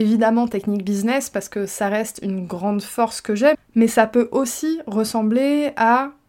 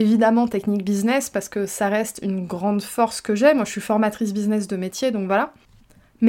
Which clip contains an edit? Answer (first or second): first